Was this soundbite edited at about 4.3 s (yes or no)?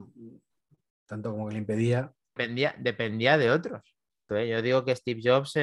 yes